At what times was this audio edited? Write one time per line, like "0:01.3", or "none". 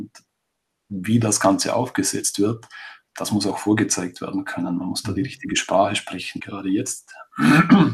0:06.4